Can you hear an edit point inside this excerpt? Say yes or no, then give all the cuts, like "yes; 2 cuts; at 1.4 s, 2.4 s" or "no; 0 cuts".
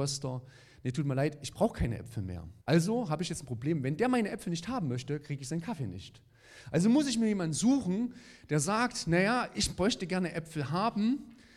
yes; 1 cut; at 2.6 s